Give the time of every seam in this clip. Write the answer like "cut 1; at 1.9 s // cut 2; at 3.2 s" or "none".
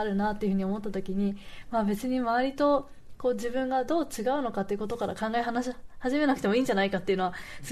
none